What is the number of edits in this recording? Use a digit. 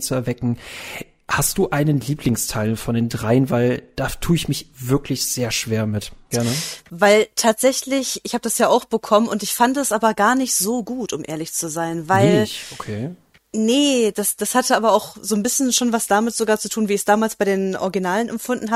1